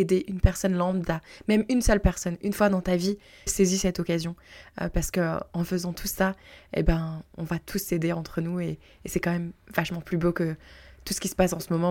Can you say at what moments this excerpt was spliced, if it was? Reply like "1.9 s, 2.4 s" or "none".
3.5 s